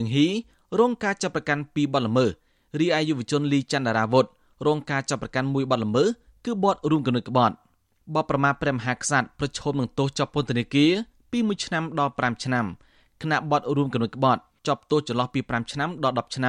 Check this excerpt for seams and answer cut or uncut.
uncut